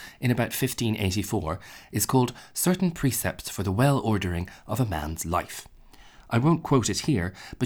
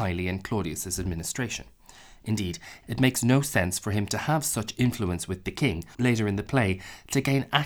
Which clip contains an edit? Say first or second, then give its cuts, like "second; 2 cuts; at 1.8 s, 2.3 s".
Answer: second; 2 cuts; at 2.8 s, 5.9 s